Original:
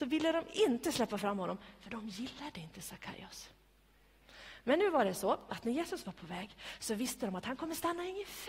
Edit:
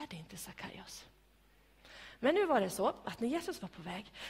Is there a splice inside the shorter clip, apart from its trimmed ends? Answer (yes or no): no